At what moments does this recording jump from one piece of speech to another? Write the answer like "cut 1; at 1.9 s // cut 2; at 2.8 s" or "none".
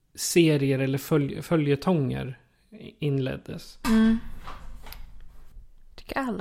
cut 1; at 3.8 s